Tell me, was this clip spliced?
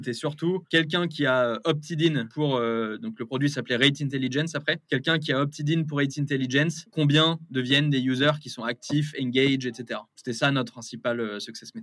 no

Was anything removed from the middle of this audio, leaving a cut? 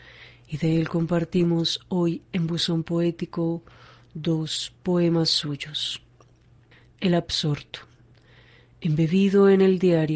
no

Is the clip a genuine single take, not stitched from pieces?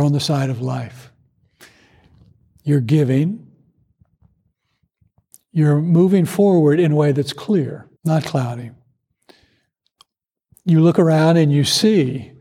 no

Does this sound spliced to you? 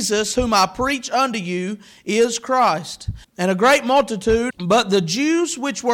yes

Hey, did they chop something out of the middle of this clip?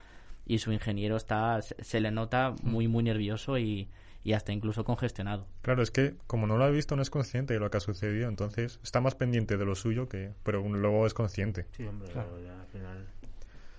no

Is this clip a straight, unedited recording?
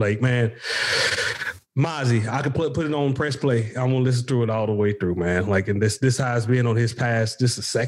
yes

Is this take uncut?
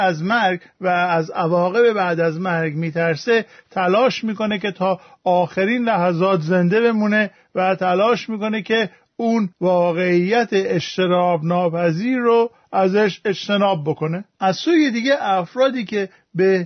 no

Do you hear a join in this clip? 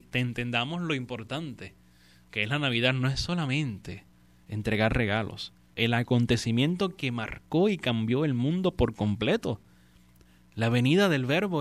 yes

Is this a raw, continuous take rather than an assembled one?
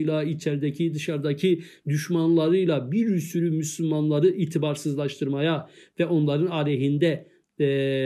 yes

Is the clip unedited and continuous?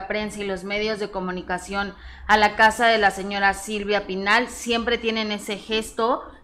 yes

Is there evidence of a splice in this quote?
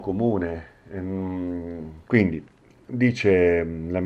yes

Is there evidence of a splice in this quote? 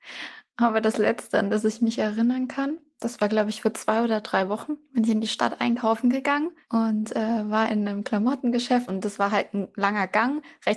yes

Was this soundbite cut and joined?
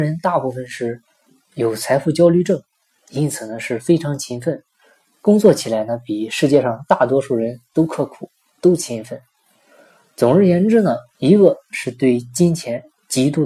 yes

